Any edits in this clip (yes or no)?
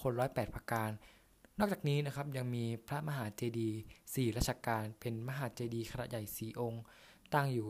no